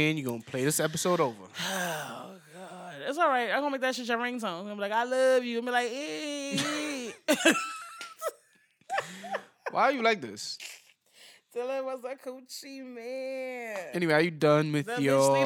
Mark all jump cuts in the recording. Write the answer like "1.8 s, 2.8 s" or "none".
none